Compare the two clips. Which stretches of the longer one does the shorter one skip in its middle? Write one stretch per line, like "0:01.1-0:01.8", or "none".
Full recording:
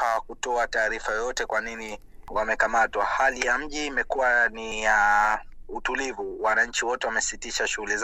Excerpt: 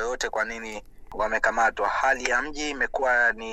none